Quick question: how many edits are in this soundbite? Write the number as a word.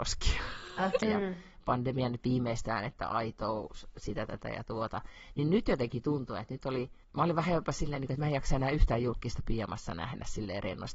two